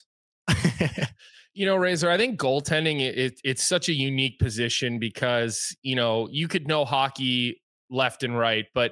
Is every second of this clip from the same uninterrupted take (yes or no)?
yes